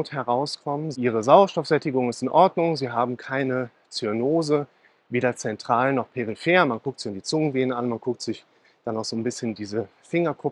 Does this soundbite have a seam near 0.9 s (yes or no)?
yes